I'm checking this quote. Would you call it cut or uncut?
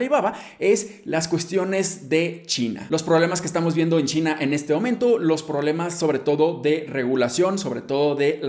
uncut